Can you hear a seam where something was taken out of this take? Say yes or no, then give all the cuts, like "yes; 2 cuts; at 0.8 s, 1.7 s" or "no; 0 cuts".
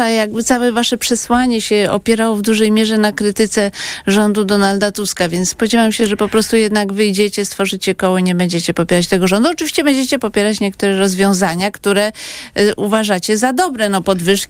no; 0 cuts